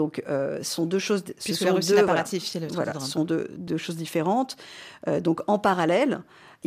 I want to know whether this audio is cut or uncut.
uncut